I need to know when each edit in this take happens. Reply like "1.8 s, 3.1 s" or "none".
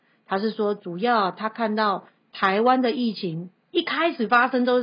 none